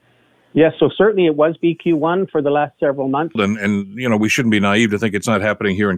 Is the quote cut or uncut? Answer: cut